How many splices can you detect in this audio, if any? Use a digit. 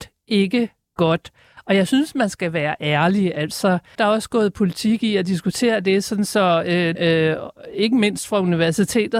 2